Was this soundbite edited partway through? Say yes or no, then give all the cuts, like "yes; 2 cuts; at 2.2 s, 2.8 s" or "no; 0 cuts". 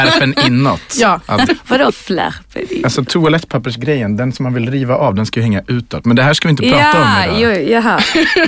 yes; 1 cut; at 1.5 s